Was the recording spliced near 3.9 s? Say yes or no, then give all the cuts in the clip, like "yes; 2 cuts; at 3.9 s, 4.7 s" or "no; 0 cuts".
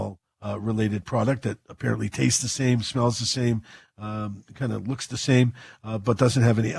no; 0 cuts